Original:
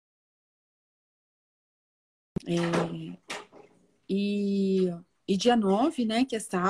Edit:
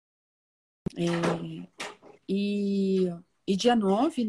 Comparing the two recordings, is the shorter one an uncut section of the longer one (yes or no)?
no